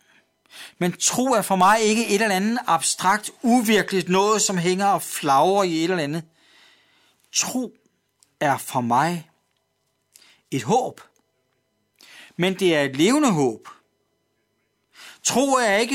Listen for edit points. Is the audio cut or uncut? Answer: uncut